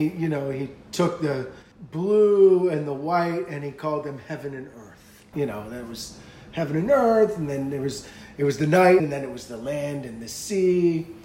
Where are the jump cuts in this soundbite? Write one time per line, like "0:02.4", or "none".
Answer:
0:05.3
0:09.0